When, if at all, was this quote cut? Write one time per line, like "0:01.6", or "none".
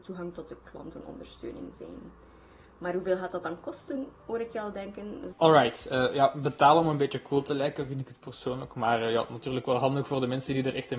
0:05.3